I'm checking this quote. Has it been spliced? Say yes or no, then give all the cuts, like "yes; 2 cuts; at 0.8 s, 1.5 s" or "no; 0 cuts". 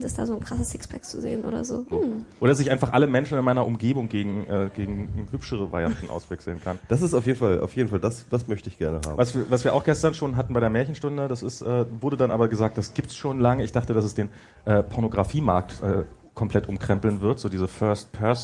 yes; 1 cut; at 1.9 s